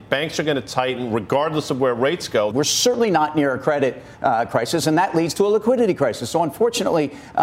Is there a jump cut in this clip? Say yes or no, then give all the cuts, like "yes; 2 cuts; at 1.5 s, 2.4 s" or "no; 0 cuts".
yes; 1 cut; at 2.5 s